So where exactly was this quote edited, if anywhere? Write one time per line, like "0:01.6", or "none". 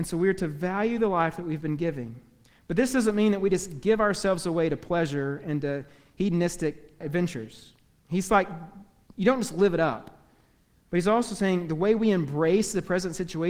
0:07.0